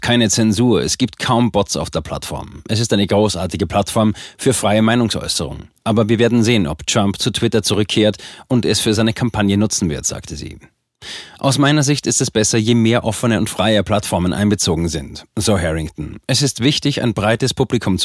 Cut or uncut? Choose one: uncut